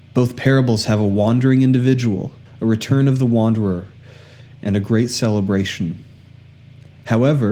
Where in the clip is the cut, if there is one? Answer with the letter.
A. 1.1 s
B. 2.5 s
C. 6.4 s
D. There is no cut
B